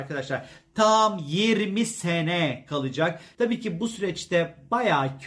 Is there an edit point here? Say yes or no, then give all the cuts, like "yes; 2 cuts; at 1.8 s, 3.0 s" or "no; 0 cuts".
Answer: yes; 1 cut; at 3.3 s